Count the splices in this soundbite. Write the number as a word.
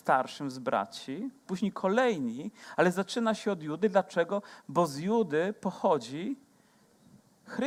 one